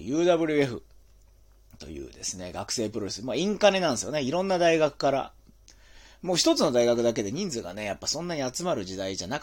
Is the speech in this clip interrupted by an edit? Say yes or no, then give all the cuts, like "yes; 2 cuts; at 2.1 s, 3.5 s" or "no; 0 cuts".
no; 0 cuts